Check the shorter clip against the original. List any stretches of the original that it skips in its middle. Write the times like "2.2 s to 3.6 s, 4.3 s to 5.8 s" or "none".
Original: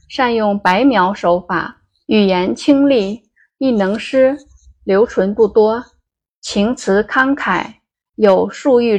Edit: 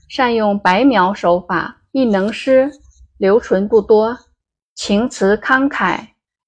1.9 s to 3.6 s